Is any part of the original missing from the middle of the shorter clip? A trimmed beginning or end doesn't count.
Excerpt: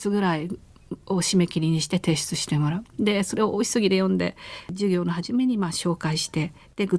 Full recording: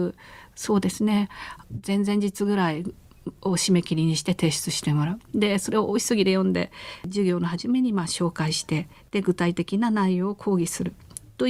no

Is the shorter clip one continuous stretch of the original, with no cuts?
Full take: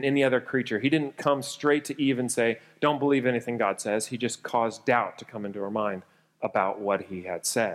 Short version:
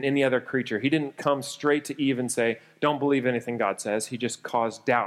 yes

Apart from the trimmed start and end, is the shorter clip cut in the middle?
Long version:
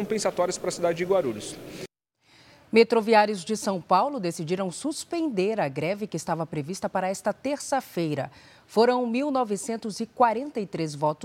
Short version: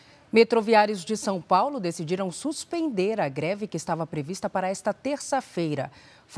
no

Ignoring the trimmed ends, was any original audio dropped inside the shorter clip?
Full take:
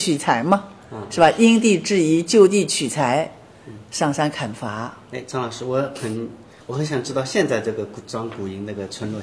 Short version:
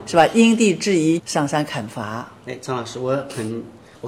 yes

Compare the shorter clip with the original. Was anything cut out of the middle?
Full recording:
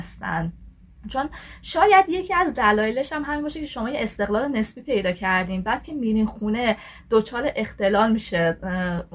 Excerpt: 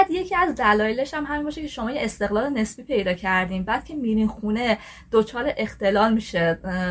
no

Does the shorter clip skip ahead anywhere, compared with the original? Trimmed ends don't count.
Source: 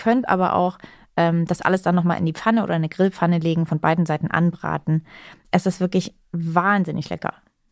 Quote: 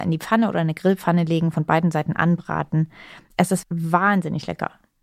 yes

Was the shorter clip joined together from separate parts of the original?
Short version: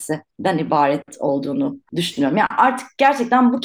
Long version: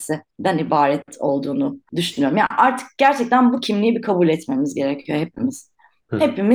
no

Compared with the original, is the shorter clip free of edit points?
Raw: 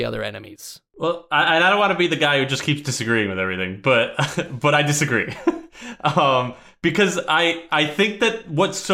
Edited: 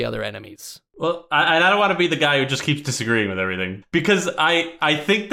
no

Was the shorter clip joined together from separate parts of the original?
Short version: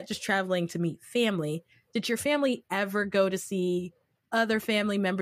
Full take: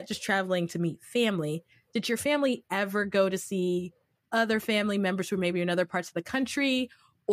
no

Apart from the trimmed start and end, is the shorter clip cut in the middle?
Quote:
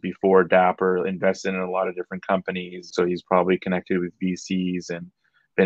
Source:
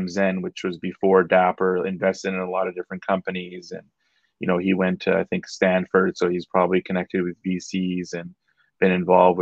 yes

